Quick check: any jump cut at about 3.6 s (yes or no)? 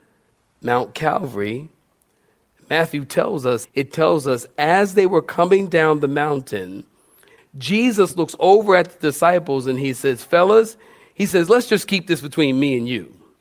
yes